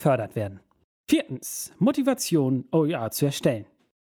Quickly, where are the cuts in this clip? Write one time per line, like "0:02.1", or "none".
0:01.0